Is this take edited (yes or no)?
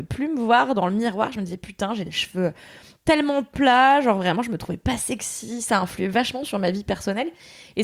no